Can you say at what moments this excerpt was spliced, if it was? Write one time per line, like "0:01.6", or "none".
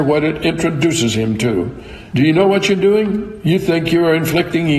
0:02.1